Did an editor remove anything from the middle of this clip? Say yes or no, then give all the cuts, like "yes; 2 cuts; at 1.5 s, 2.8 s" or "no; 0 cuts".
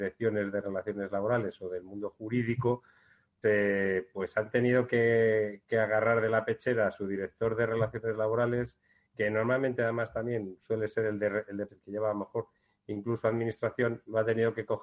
yes; 2 cuts; at 3.4 s, 11.7 s